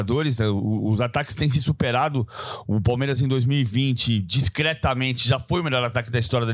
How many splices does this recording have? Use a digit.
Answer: 0